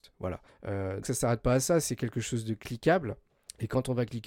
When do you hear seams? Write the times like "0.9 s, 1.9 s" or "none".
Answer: 1.0 s